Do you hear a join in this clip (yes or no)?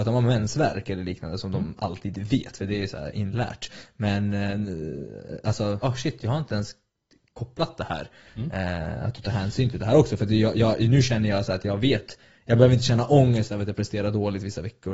yes